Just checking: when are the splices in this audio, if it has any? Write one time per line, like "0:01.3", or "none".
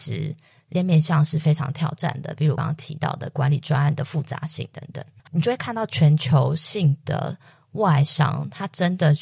0:02.6
0:05.2